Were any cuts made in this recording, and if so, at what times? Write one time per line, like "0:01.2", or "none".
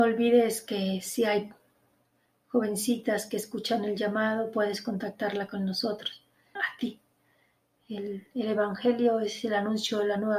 0:06.6